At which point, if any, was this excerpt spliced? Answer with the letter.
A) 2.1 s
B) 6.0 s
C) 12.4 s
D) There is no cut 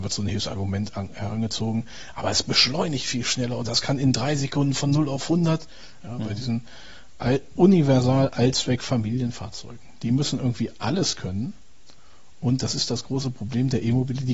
B